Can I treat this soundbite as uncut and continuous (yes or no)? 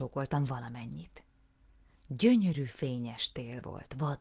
yes